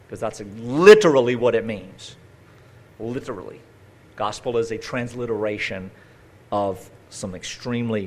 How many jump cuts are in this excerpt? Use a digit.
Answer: 0